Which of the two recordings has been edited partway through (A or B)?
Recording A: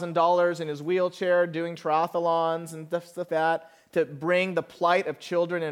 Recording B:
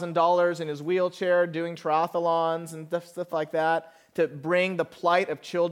A